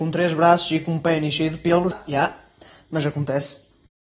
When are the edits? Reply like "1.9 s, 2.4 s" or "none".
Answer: 1.9 s